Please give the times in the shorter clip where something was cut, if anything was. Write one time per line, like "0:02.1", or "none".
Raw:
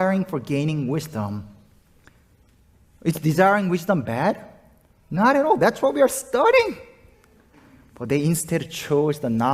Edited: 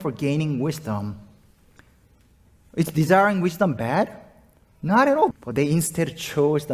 0:05.3